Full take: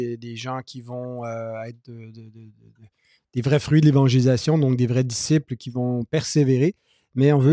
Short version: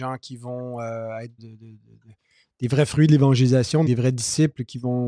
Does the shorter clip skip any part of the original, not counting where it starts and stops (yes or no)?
yes